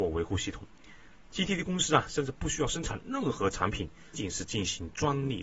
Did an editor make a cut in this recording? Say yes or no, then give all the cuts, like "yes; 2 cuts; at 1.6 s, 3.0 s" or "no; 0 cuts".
yes; 1 cut; at 4.1 s